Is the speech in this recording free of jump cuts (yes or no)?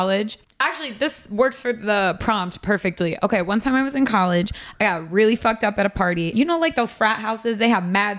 no